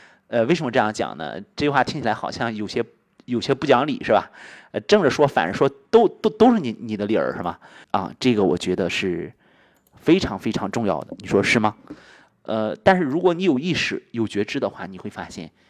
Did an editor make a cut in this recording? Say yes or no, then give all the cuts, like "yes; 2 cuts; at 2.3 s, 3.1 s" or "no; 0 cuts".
yes; 2 cuts; at 7.8 s, 12.3 s